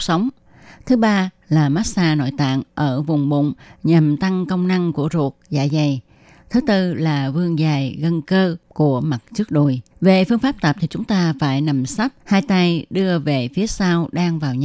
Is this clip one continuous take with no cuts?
no; 2 cuts; at 9.9 s, 12.2 s

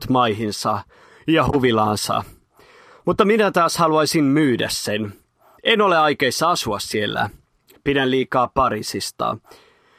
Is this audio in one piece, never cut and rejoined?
yes; 0 cuts

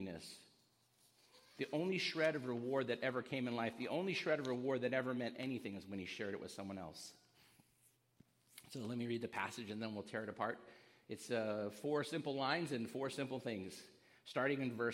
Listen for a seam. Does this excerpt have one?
no; 0 cuts

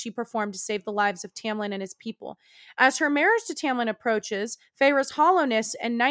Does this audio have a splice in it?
no; 0 cuts

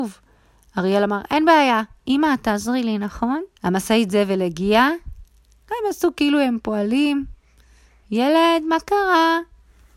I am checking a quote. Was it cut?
yes; 1 cut; at 3.5 s

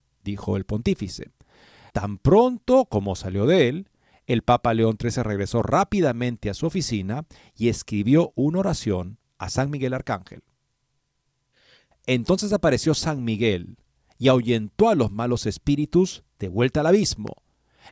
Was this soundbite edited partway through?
yes; 2 cuts; at 1.9 s, 11.9 s

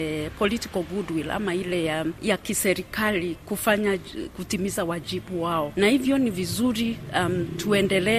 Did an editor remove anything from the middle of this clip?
no; 0 cuts

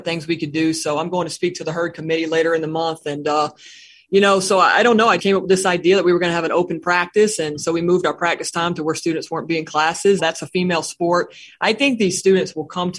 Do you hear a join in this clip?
yes; 2 cuts; at 5.2 s, 10.2 s

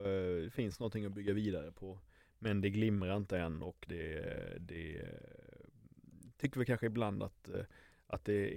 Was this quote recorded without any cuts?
no; 1 cut; at 3.9 s

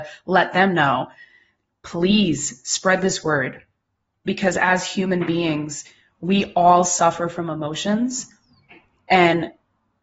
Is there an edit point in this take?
no; 0 cuts

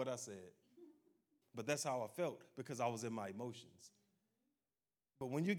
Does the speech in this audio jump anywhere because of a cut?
yes; 1 cut; at 1.4 s

